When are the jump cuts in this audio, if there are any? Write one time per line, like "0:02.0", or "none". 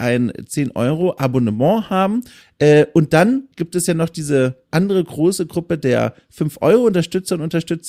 0:02.4